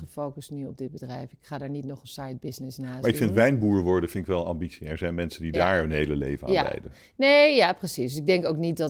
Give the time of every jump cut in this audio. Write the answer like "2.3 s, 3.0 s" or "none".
none